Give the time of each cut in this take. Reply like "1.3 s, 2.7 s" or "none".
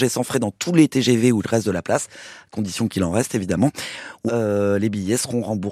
4.3 s